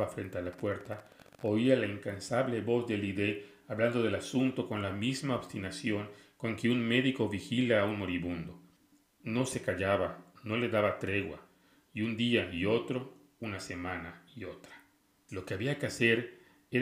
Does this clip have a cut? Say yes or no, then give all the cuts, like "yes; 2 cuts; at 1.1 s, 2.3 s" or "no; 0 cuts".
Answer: yes; 1 cut; at 15.3 s